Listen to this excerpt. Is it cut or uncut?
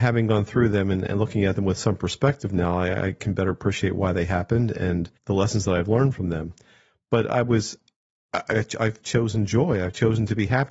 cut